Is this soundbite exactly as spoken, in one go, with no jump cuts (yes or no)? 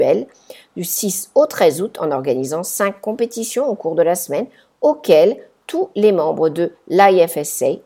yes